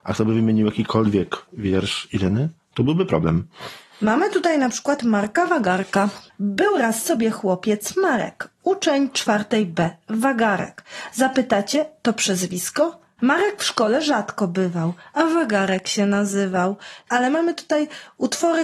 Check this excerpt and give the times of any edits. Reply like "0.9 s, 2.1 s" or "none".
13.2 s, 17.1 s